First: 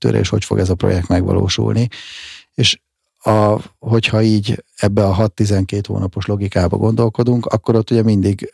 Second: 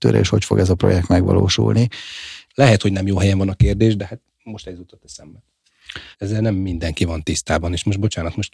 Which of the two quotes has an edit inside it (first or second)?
second